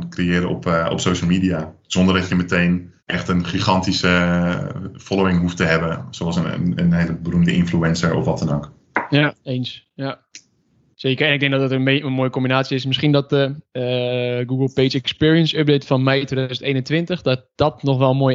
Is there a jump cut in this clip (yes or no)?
yes